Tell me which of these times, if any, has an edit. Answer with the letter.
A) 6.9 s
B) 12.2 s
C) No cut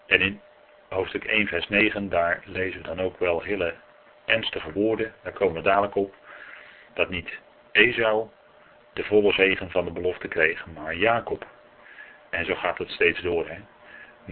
A